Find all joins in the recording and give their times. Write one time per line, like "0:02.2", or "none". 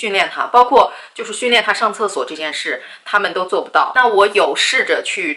none

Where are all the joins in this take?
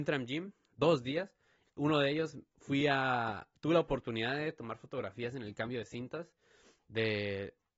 none

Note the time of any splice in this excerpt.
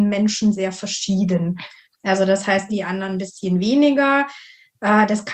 0:02.7

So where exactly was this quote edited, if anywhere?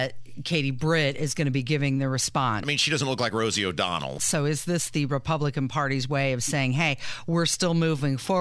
0:02.6
0:04.2

